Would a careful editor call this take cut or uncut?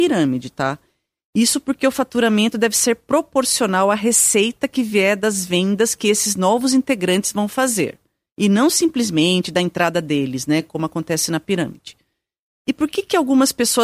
uncut